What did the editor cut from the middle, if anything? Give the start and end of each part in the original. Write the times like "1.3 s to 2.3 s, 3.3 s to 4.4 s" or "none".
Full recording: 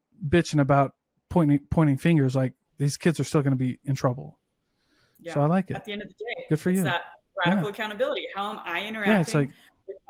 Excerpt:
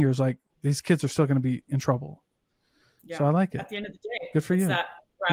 none